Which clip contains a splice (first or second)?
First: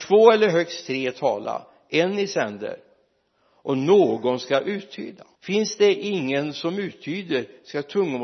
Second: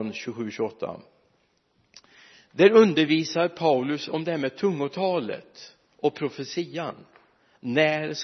first